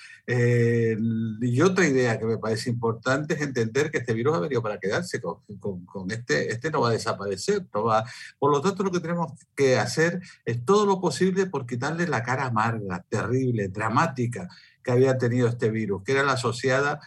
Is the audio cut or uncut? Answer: uncut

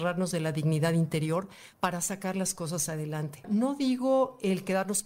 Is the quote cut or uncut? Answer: cut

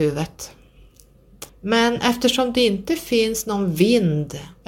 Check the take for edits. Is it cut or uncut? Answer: cut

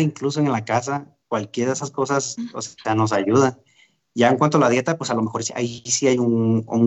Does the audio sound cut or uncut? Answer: uncut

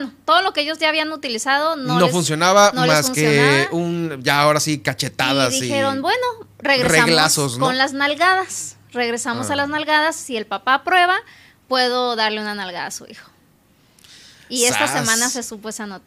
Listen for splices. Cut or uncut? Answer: uncut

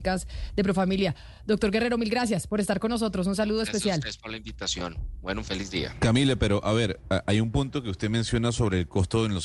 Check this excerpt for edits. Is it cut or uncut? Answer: uncut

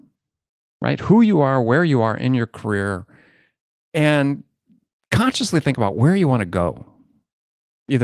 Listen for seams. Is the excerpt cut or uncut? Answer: uncut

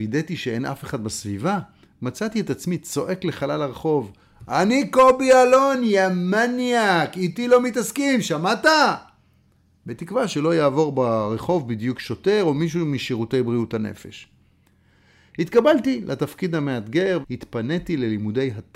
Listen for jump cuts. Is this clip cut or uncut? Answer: cut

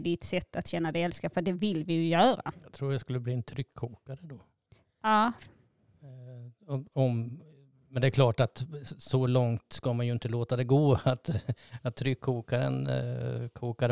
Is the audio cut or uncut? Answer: uncut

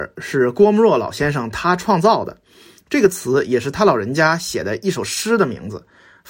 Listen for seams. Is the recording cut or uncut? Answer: uncut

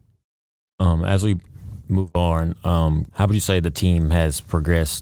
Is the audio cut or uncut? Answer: cut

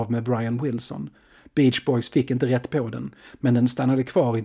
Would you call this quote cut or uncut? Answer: uncut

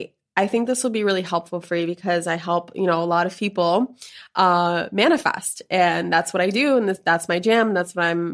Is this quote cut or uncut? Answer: uncut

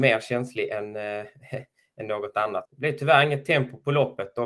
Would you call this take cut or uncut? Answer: cut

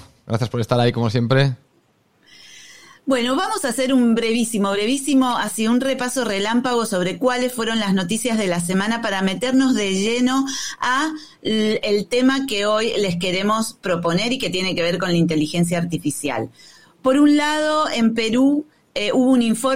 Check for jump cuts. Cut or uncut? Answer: uncut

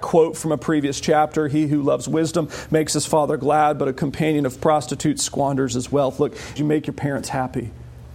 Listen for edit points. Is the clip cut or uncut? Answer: cut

